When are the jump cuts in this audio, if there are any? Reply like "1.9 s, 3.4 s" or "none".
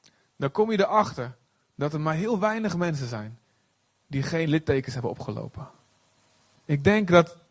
6.6 s